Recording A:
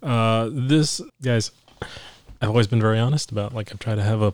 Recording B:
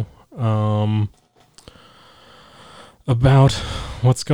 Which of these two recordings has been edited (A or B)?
A